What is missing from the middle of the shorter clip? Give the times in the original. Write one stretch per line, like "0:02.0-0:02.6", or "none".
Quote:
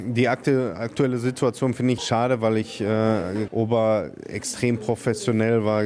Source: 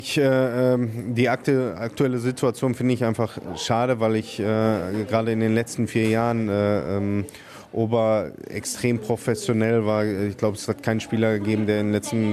0:03.0-0:03.6
0:05.1-0:07.7